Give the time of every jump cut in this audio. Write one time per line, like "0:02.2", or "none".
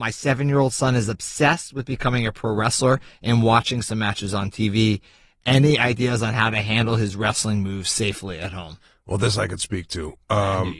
none